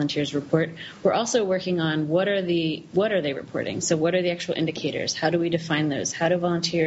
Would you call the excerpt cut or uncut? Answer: uncut